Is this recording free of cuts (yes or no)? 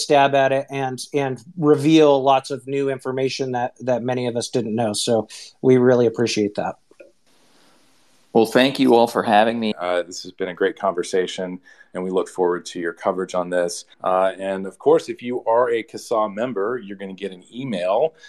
no